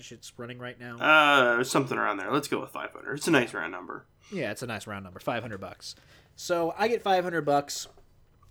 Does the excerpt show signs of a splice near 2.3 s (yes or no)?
no